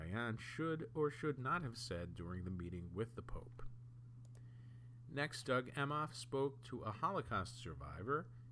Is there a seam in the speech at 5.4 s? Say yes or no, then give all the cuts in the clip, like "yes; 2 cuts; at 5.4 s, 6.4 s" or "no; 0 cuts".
yes; 1 cut; at 5.4 s